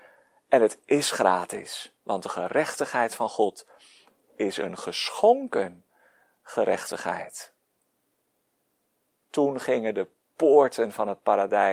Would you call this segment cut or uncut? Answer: uncut